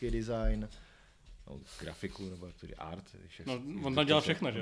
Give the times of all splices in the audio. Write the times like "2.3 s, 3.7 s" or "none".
none